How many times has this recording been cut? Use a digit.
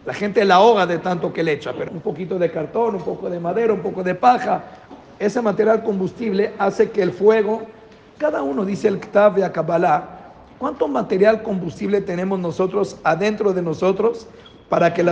2